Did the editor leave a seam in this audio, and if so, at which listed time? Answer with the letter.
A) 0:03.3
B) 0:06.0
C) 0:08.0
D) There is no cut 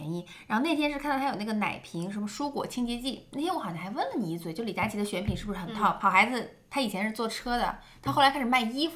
B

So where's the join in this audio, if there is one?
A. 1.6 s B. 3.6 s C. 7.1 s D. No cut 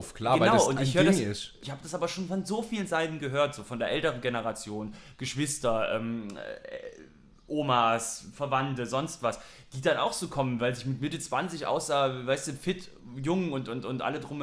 A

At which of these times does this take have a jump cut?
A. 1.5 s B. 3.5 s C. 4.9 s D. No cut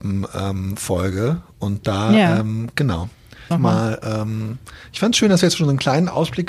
B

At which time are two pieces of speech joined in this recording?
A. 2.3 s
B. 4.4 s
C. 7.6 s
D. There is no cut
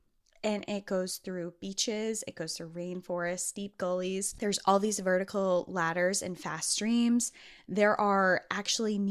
D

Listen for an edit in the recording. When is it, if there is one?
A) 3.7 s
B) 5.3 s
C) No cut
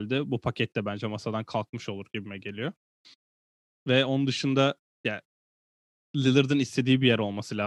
C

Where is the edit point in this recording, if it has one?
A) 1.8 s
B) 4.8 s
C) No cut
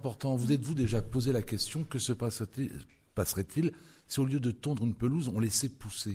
C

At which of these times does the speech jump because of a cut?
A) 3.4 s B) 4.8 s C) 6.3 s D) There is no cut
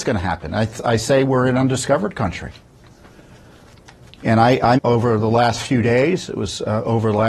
B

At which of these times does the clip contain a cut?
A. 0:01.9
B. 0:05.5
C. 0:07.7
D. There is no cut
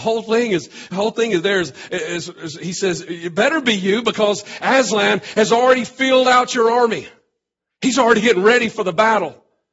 D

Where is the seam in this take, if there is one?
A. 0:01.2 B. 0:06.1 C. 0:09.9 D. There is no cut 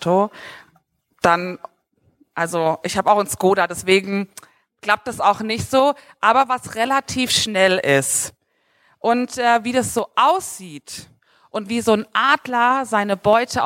D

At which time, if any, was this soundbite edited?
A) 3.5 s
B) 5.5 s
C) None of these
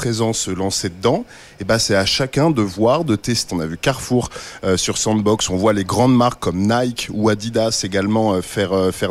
A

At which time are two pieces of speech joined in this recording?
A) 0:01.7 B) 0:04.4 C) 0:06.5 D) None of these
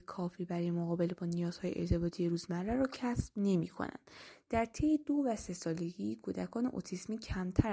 B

